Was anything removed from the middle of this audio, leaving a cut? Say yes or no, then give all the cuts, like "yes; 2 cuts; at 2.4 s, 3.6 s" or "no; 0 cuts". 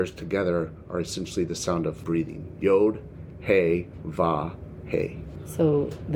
no; 0 cuts